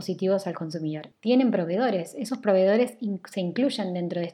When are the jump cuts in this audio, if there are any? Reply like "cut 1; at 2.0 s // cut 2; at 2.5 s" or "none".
cut 1; at 1.1 s